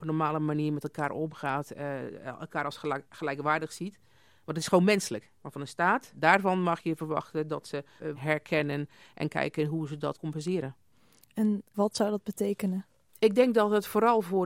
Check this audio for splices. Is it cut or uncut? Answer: cut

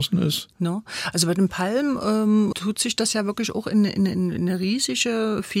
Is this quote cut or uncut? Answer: cut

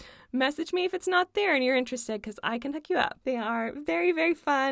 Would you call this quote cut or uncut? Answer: cut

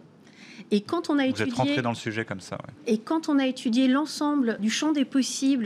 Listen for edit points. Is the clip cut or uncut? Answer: cut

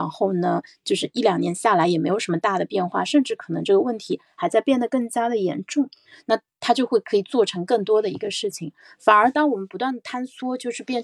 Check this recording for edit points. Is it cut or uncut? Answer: cut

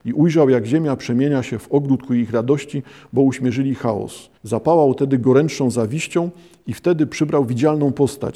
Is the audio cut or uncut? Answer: cut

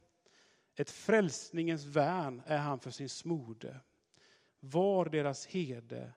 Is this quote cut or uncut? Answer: cut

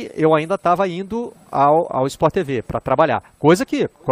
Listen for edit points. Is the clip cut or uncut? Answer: cut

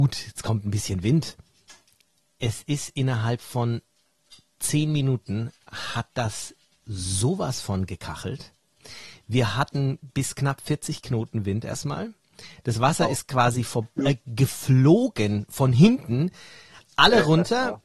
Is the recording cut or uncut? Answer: uncut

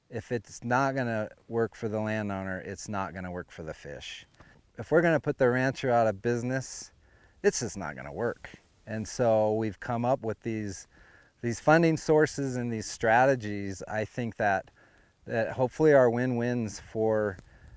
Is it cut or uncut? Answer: uncut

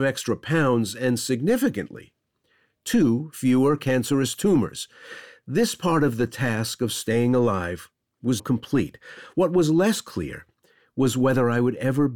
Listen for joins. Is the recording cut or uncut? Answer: cut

